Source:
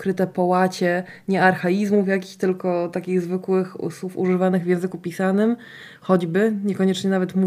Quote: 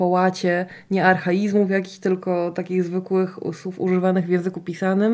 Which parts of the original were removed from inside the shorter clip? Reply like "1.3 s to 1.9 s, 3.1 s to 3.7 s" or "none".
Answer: none